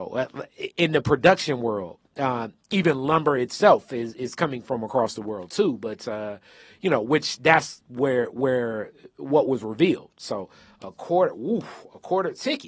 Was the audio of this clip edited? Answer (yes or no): no